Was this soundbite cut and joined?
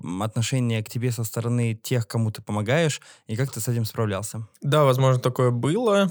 no; 0 cuts

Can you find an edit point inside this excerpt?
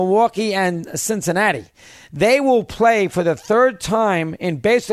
no; 0 cuts

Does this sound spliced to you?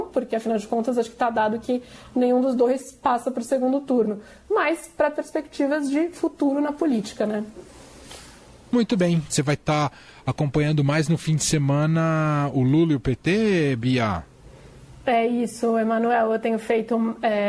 yes; 1 cut; at 9.3 s

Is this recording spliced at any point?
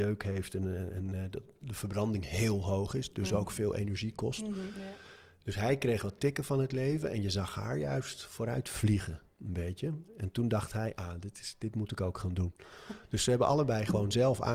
no; 0 cuts

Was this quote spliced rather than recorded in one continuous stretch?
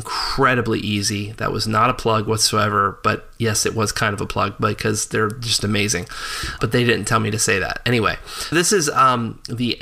yes; 2 cuts; at 6.6 s, 8.5 s

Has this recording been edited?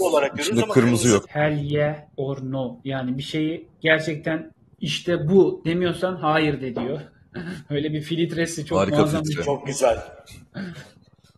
yes; 1 cut; at 1.2 s

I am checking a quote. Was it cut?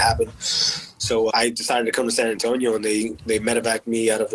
yes; 1 cut; at 1.3 s

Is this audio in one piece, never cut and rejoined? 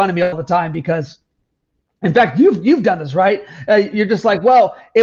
yes; 0 cuts

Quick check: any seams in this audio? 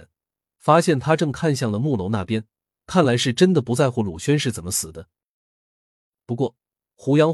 no; 0 cuts

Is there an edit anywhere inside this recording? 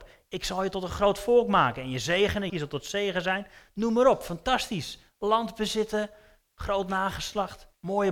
yes; 1 cut; at 2.5 s

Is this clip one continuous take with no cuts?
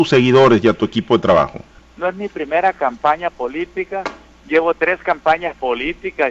no; 1 cut; at 1.8 s

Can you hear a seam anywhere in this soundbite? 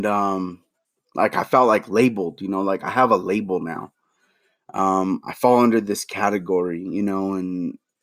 no; 0 cuts

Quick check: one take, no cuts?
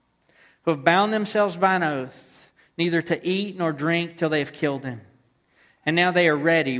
yes; 0 cuts

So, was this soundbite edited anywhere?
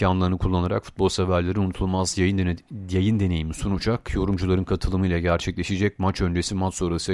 no; 0 cuts

